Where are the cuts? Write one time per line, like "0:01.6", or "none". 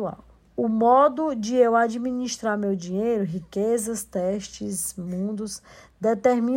none